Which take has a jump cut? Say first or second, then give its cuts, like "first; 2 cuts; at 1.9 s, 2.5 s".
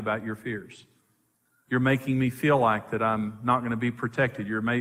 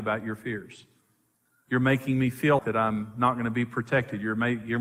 second; 1 cut; at 2.6 s